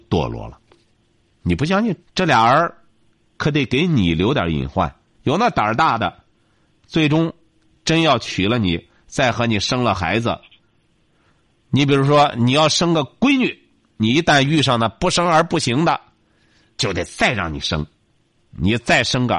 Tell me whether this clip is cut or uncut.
cut